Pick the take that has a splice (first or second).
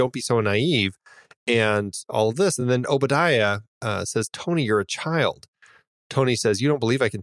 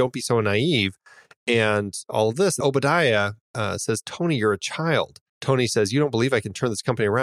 second